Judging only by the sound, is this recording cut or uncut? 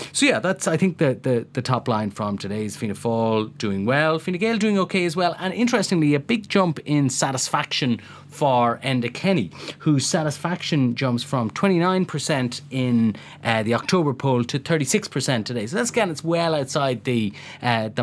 uncut